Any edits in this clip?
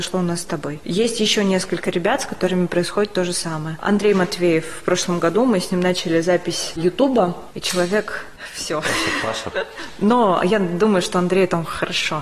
yes; 2 cuts; at 7.5 s, 9.5 s

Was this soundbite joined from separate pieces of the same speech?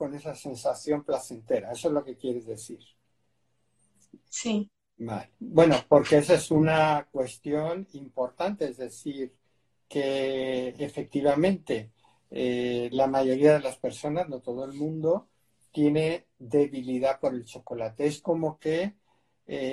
yes; 1 cut; at 5.3 s

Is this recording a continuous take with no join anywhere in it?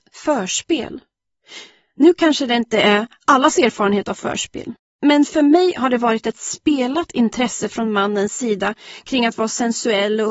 yes; 0 cuts

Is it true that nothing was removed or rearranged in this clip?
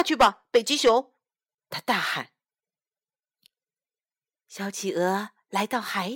yes; 0 cuts

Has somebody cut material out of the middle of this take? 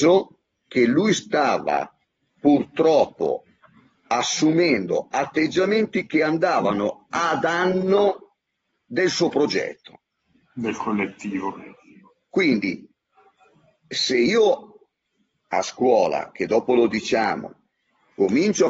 no; 0 cuts

